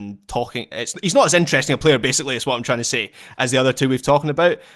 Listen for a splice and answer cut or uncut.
uncut